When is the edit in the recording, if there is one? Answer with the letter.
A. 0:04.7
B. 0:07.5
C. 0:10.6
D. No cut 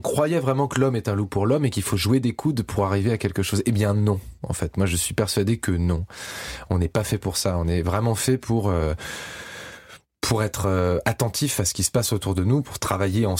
D